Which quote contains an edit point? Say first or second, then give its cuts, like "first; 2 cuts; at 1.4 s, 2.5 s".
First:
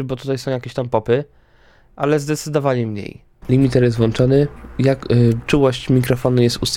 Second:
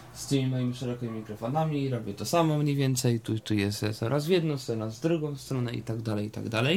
first; 1 cut; at 3.4 s